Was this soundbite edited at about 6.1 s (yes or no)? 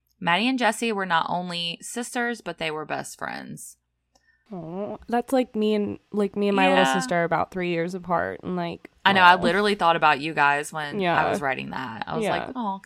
yes